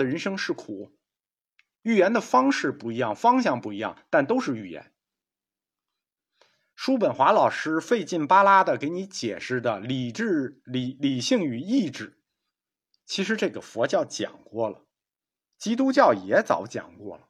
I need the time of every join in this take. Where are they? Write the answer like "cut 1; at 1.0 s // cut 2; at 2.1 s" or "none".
none